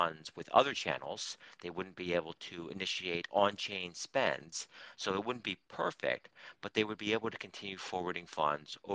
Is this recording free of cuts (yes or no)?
yes